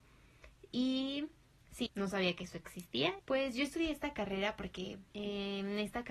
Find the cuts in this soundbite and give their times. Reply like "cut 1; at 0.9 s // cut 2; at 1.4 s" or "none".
cut 1; at 1.9 s // cut 2; at 3.2 s // cut 3; at 5.1 s